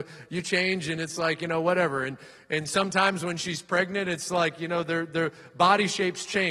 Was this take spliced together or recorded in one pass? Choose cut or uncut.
uncut